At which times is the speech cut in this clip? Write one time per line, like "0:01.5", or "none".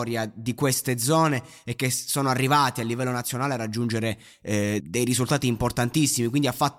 0:04.8